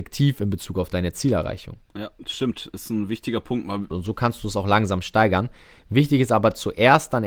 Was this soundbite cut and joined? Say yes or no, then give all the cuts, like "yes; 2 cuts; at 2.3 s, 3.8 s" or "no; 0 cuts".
yes; 1 cut; at 3.9 s